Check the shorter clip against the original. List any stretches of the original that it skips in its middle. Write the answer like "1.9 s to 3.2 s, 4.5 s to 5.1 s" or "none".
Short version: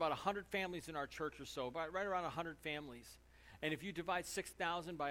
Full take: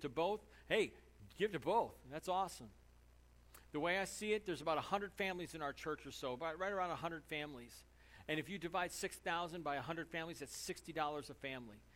none